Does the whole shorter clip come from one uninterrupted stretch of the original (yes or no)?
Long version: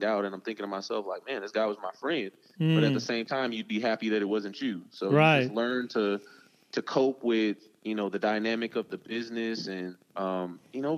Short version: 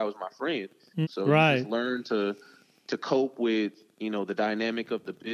no